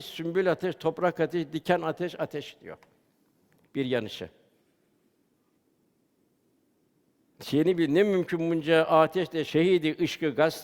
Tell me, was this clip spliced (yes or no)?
yes